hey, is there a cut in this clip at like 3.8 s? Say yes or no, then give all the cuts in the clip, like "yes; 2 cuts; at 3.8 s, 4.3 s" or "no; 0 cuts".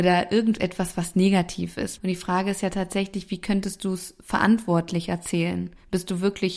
no; 1 cut; at 2.0 s